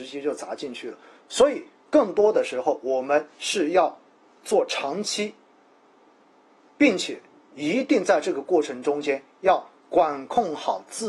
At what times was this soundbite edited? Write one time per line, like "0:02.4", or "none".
0:01.2